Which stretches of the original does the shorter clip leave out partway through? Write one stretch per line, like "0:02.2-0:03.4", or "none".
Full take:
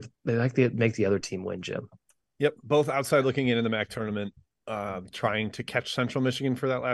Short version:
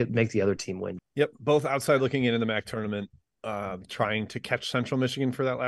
0:01.6-0:02.2